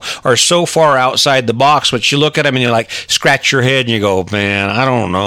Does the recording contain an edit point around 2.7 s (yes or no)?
no